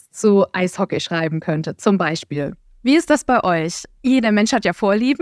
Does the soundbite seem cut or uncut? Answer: uncut